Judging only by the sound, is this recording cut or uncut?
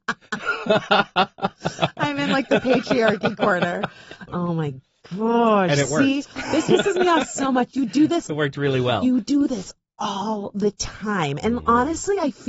cut